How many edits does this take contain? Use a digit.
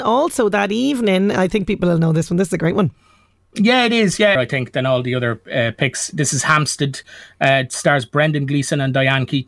1